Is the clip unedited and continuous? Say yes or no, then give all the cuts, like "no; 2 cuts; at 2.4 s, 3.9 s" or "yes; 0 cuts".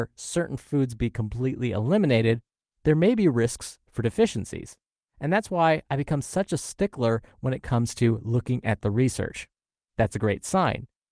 no; 1 cut; at 9.8 s